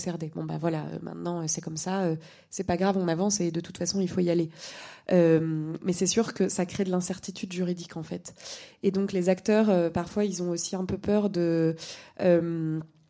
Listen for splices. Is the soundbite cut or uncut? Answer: uncut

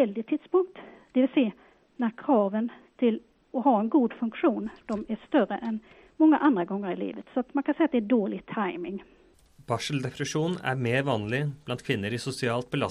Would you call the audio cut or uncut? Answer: uncut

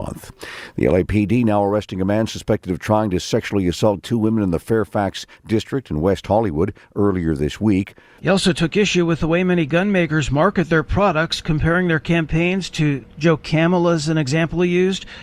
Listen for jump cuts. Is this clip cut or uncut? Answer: cut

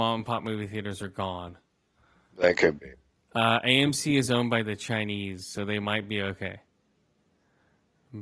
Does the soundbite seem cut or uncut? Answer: uncut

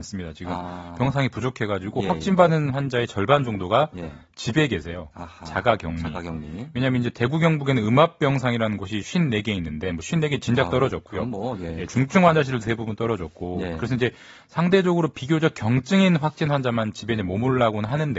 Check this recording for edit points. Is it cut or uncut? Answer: uncut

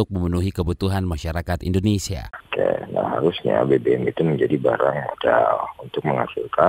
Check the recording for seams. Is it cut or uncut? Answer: cut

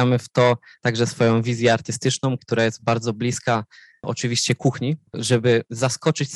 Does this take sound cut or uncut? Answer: cut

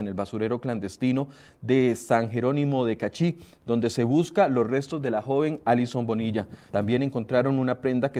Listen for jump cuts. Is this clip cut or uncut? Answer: cut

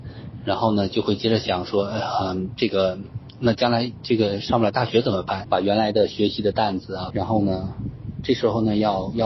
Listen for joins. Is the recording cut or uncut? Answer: cut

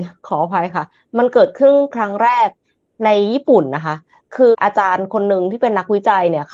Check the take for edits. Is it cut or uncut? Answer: cut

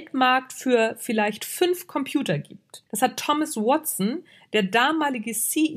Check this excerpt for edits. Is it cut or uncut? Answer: cut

